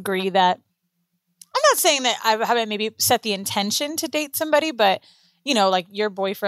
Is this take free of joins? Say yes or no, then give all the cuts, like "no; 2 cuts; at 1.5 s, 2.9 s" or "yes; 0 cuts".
yes; 0 cuts